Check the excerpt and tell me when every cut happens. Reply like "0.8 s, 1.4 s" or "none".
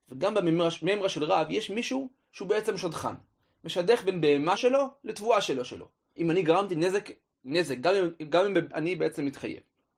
4.6 s, 6.2 s, 8.7 s